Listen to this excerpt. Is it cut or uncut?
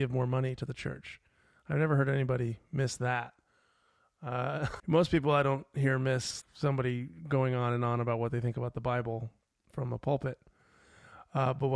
cut